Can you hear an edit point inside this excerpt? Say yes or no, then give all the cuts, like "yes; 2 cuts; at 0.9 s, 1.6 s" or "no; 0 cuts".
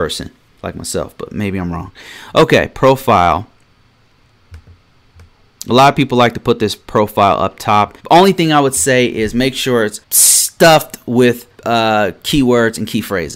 yes; 3 cuts; at 8.0 s, 10.0 s, 11.6 s